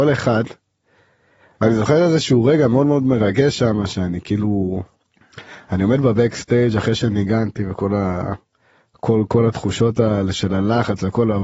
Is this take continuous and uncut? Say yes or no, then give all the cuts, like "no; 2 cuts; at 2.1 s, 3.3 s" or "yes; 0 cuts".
no; 1 cut; at 1.5 s